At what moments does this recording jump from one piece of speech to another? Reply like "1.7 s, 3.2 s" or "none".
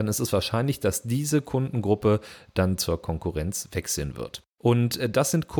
4.6 s